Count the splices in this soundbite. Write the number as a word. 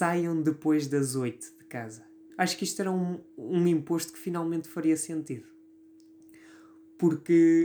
one